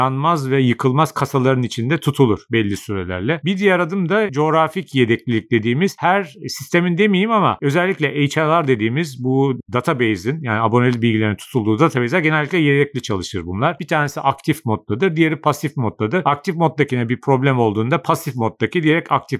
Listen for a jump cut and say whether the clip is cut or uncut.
cut